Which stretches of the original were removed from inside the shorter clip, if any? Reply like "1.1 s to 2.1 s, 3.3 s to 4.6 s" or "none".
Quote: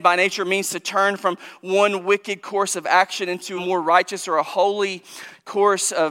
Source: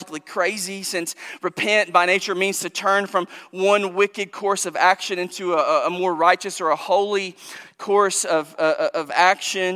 5.5 s to 5.9 s